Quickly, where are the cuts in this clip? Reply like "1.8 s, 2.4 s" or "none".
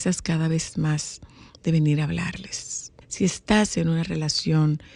3.0 s